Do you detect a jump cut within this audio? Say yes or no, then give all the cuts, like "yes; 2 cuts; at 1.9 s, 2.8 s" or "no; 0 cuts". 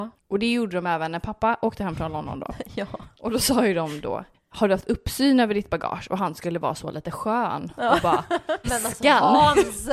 yes; 1 cut; at 8.6 s